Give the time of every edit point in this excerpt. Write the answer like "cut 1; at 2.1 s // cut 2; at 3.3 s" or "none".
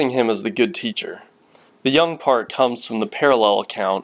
cut 1; at 1.7 s